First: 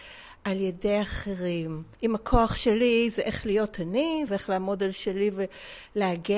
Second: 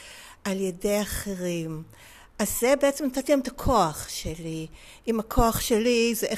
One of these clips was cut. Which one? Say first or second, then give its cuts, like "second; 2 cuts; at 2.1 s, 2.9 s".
first; 2 cuts; at 1.9 s, 4.3 s